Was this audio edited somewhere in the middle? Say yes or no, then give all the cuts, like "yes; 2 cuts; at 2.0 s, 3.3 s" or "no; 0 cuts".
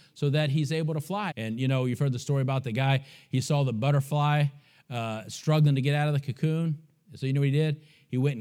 yes; 1 cut; at 1.3 s